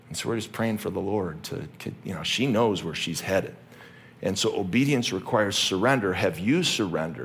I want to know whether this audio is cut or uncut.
uncut